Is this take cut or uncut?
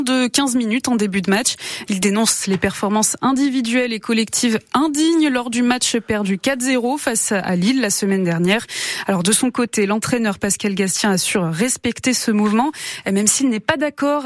cut